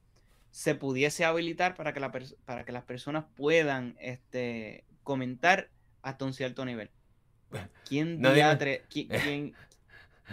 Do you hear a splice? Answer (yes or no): yes